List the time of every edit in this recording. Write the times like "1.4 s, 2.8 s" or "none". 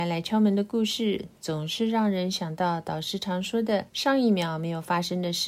3.9 s

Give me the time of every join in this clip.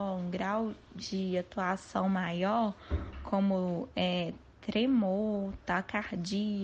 none

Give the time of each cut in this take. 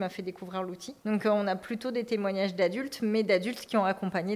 none

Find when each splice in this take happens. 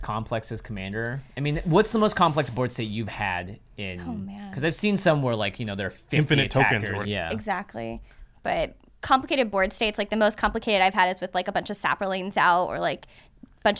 7.0 s

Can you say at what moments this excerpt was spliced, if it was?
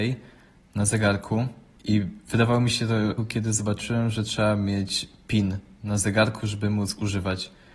3.2 s

